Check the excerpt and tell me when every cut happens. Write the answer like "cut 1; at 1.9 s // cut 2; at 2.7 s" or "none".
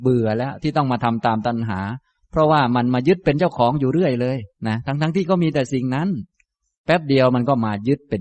cut 1; at 4.5 s